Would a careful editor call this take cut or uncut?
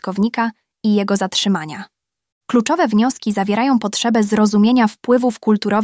cut